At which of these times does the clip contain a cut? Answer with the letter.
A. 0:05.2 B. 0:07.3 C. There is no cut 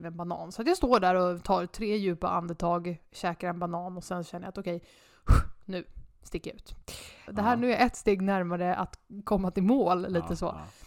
B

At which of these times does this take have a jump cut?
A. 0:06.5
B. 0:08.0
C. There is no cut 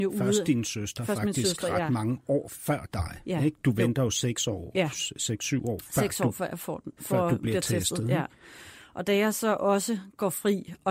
C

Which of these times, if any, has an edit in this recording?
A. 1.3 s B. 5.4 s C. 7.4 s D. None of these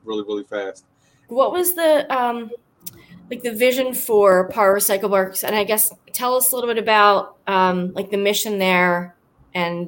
A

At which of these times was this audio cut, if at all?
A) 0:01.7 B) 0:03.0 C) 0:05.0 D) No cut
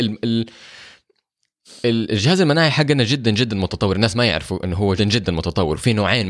C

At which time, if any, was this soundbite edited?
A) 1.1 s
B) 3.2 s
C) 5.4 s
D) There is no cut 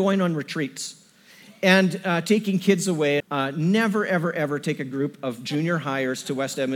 B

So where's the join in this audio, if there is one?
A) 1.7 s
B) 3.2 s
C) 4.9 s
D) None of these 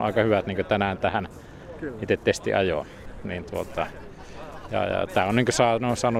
B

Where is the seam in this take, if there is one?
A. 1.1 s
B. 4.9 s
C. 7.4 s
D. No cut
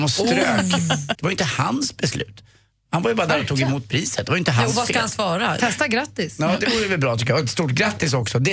A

